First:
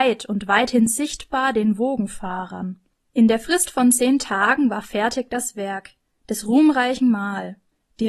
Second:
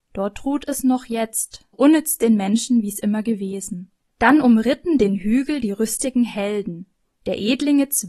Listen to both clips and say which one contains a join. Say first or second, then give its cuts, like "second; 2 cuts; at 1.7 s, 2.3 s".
second; 1 cut; at 1.7 s